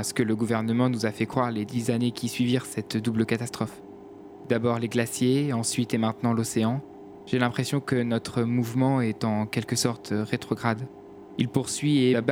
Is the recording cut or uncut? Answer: uncut